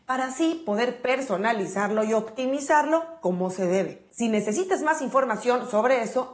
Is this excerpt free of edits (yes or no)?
yes